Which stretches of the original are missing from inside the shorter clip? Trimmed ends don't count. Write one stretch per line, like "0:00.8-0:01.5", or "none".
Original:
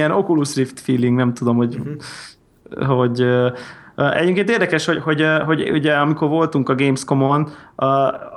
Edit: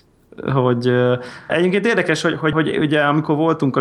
0:03.8-0:04.1
0:05.2-0:05.5